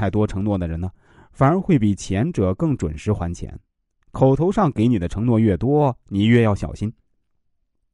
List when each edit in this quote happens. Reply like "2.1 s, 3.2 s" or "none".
none